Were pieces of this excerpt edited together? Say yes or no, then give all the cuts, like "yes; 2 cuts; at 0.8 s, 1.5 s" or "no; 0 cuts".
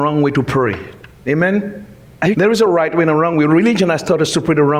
yes; 1 cut; at 2.3 s